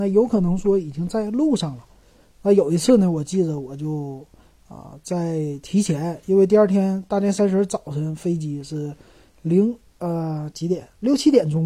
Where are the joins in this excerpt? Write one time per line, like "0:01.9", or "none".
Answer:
none